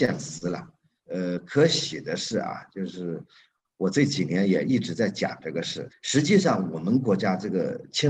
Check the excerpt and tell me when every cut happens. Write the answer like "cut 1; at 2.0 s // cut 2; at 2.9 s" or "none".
cut 1; at 1.0 s // cut 2; at 5.9 s